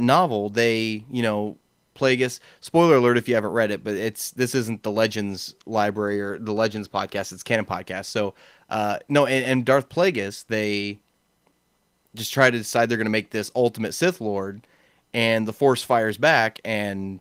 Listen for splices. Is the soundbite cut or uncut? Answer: uncut